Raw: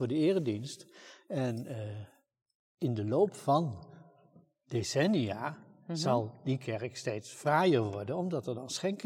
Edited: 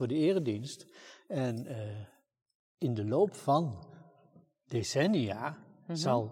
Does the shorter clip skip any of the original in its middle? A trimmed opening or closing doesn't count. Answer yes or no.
no